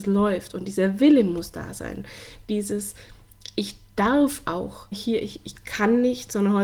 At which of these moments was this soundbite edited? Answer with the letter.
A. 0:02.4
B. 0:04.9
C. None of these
B